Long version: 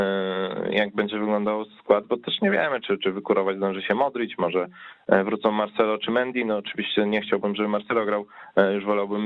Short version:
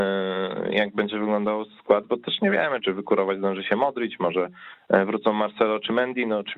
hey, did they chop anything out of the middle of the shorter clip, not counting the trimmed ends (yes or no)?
yes